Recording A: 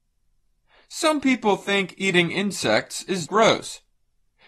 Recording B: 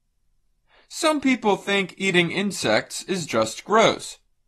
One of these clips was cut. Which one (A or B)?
A